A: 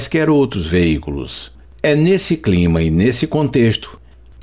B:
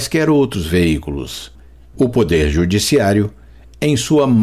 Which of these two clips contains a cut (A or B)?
A